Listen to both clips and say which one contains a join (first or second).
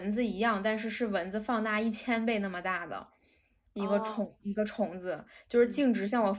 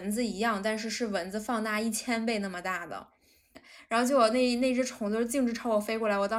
second